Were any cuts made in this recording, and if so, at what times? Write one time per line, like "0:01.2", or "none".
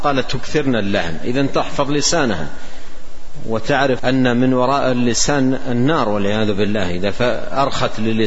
0:04.0

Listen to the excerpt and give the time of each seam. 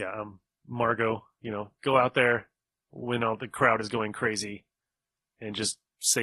none

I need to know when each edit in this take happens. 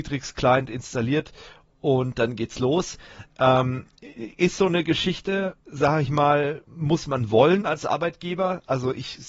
0:05.6
0:06.7

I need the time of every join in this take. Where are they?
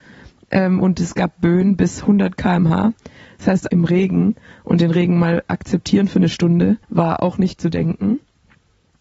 0:03.7
0:06.8

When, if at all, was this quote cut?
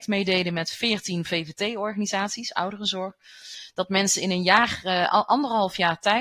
none

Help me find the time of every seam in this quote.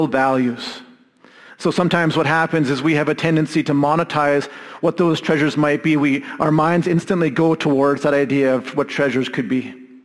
none

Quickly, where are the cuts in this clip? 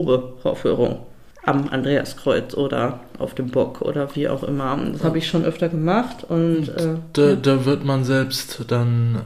none

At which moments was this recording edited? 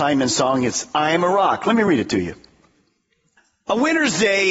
none

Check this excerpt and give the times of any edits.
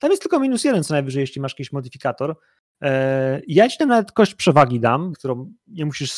0:05.1

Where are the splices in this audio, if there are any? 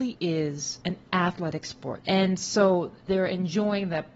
0:02.0

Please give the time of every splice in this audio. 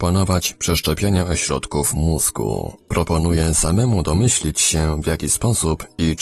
0:02.8

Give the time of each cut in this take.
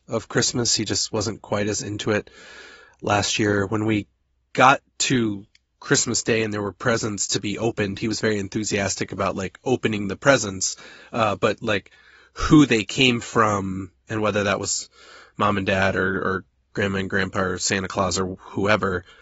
none

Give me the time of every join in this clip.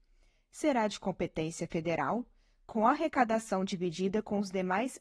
none

